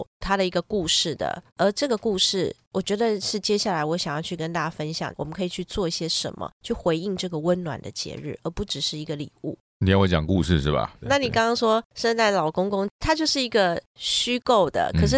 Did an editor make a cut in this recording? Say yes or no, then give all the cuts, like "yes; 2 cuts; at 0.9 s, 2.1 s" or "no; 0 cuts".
yes; 3 cuts; at 1.5 s, 5.1 s, 11.0 s